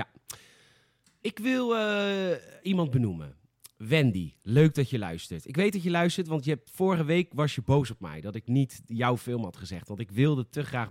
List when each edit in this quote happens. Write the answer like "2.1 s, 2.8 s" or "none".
none